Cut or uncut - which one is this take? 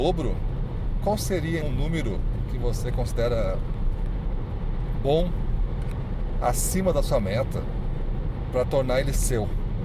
cut